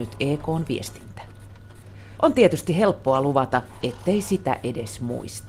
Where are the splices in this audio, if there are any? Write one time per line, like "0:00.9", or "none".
0:02.2
0:03.8